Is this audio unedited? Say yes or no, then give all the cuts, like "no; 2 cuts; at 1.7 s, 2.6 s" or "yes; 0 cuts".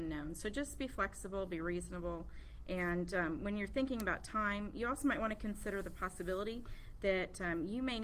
yes; 0 cuts